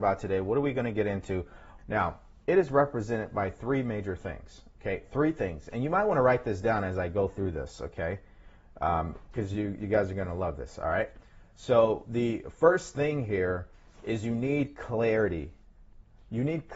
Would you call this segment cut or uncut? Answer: cut